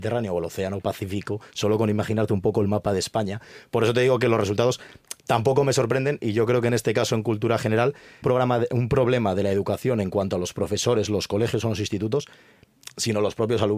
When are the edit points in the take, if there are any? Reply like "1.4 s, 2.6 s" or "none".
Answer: 8.2 s